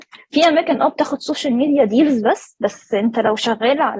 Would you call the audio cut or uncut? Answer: uncut